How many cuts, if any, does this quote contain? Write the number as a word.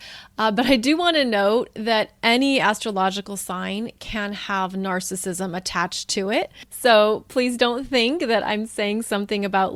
zero